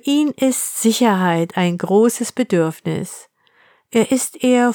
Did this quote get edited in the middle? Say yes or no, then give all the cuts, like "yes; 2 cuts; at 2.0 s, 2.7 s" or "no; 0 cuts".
no; 0 cuts